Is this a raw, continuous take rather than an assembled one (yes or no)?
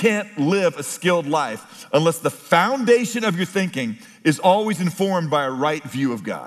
yes